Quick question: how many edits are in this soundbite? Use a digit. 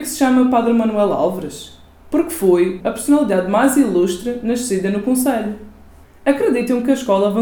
2